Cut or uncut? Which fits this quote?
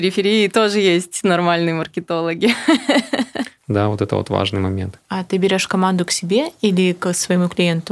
cut